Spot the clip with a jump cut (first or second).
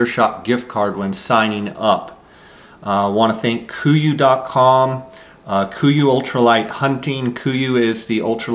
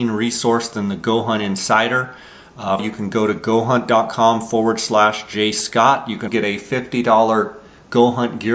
second